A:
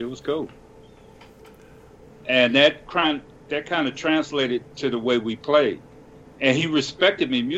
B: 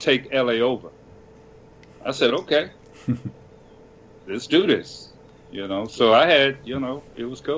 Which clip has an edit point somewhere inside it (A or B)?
A